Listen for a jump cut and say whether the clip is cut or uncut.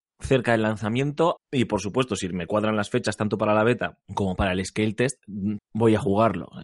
cut